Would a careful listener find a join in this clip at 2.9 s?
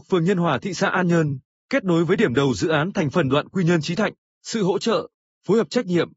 no; 1 cut; at 4.3 s

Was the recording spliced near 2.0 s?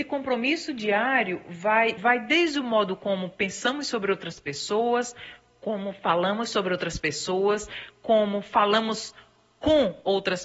yes; 1 cut; at 2.0 s

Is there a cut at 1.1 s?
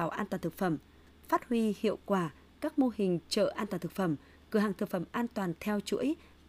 no; 0 cuts

